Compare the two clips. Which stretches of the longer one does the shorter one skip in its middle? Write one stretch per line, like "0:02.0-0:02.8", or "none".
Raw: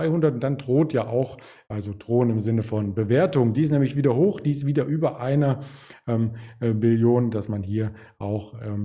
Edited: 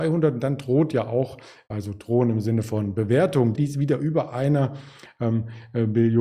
0:03.5-0:04.4